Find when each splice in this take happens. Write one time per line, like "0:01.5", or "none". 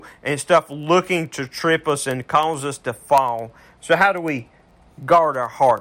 0:03.8